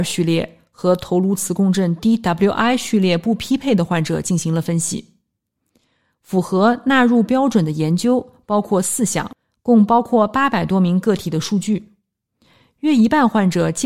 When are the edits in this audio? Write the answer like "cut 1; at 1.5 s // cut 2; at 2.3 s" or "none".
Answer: none